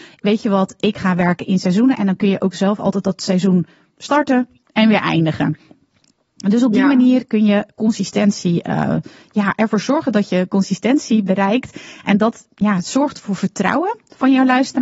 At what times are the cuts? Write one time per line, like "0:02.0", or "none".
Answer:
none

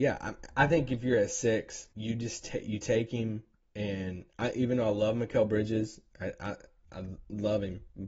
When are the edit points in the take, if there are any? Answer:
0:01.9

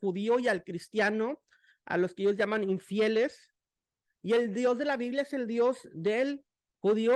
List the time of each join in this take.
none

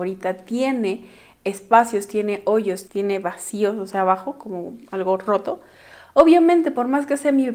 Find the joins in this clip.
0:02.8

